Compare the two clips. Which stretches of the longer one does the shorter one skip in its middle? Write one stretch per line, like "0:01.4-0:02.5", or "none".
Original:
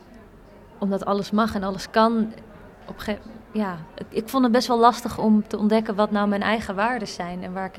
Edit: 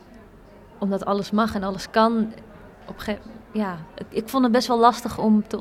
none